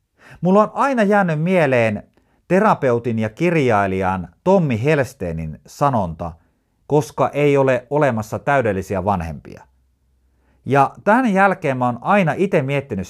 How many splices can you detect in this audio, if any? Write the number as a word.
one